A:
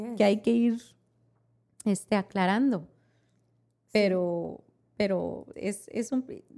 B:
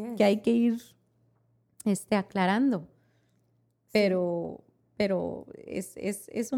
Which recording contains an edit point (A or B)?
A